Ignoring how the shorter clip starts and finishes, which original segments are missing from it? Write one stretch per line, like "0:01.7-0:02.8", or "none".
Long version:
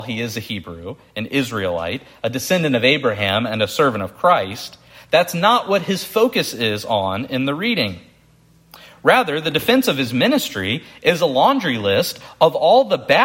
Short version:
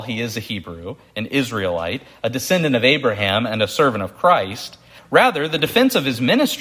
0:05.0-0:08.9